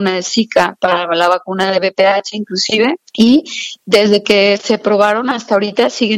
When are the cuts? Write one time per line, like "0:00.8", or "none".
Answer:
0:03.1